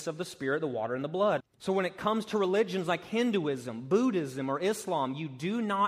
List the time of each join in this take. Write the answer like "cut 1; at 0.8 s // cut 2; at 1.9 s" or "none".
cut 1; at 1.4 s